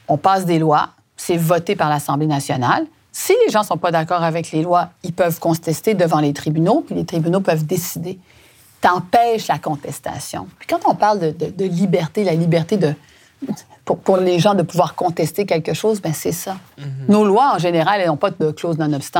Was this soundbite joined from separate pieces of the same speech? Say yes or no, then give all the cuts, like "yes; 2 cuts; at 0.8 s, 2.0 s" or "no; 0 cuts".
no; 0 cuts